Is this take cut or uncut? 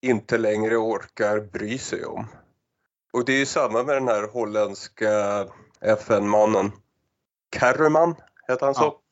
uncut